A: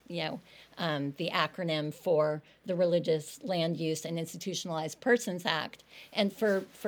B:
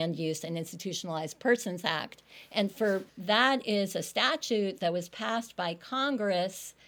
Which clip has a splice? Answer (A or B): B